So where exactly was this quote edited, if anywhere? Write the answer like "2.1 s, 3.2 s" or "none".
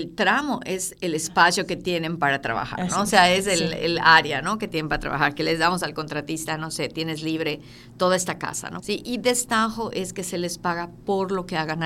8.8 s